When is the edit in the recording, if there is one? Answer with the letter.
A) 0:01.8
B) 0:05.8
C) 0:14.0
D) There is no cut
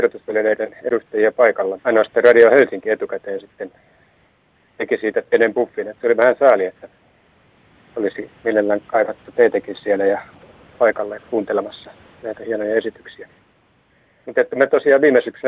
A